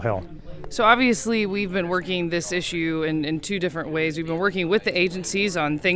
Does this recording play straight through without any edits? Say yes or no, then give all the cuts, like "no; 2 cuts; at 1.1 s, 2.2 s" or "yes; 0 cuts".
yes; 0 cuts